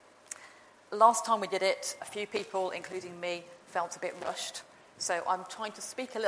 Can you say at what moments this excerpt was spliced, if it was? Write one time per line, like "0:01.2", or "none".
0:02.0